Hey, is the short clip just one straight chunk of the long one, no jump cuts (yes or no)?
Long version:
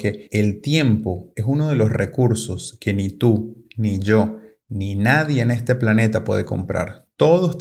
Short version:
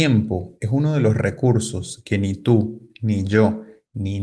yes